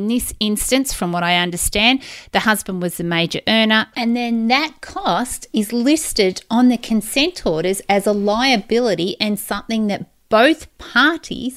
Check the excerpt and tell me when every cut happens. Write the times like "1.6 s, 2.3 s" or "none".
3.9 s